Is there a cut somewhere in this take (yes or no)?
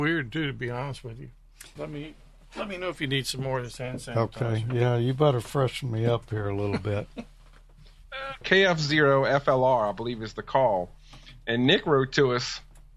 yes